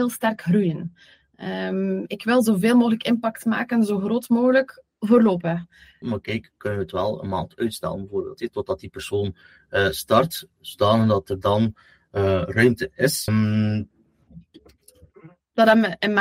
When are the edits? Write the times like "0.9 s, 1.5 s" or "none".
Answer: 6.0 s, 13.3 s